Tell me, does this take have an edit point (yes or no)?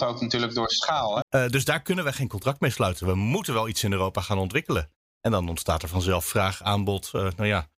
yes